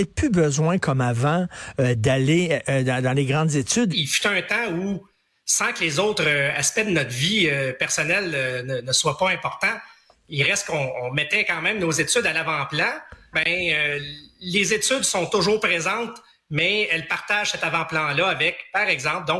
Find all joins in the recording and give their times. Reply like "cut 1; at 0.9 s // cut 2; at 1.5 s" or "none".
cut 1; at 3.9 s // cut 2; at 13.3 s